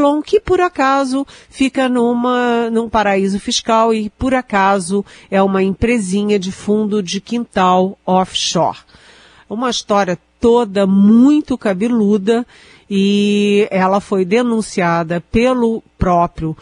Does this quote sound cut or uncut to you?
uncut